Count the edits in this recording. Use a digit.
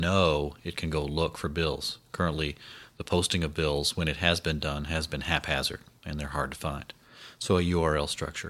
0